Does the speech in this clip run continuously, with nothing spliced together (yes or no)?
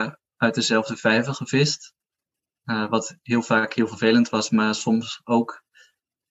no